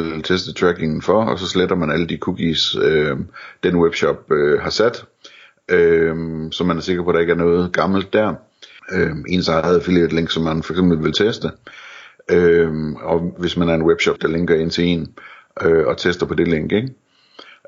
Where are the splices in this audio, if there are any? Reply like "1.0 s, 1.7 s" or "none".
8.8 s, 14.2 s